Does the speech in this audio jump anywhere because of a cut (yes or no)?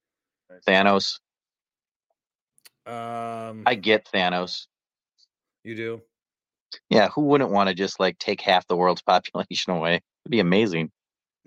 no